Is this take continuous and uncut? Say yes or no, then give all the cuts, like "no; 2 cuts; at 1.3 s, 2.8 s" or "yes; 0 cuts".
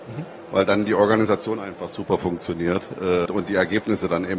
no; 1 cut; at 3.3 s